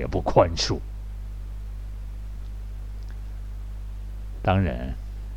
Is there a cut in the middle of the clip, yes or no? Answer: yes